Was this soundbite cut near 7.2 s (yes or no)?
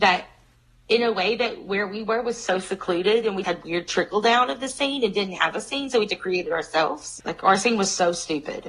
yes